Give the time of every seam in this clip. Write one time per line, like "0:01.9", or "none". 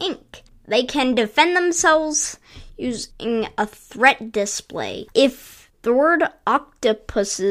0:05.1

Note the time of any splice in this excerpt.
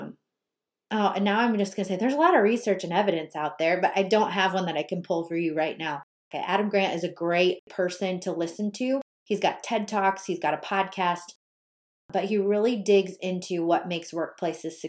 0:06.3

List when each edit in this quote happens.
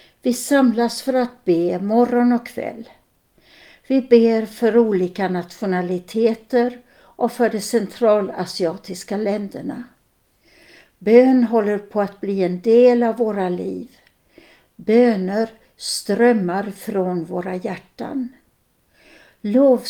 none

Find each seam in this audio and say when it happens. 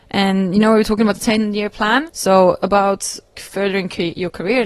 0:02.1
0:03.4

